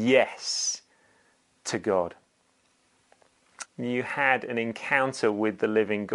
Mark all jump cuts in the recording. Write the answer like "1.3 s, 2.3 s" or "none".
3.6 s